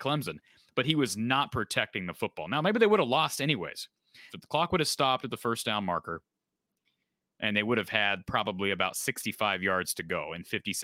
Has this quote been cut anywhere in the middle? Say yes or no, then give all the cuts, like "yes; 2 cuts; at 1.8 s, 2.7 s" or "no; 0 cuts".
yes; 1 cut; at 4.3 s